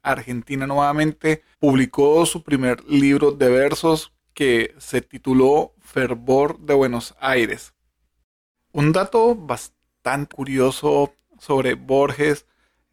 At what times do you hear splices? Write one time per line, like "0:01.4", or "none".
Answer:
0:01.5
0:08.7
0:10.3